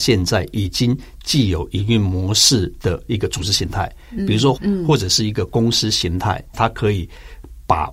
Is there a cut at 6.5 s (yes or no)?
yes